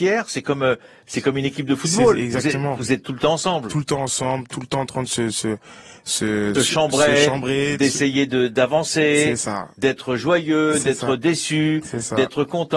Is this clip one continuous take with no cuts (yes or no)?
no